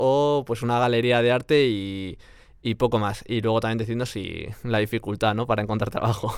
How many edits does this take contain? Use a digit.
0